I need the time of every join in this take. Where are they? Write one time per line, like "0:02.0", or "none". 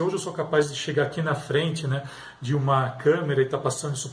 none